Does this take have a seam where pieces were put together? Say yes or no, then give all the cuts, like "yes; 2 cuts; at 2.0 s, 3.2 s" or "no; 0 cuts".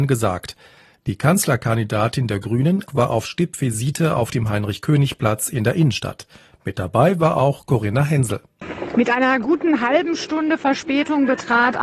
yes; 1 cut; at 2.9 s